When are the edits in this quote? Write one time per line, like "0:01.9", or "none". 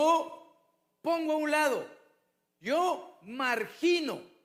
0:02.5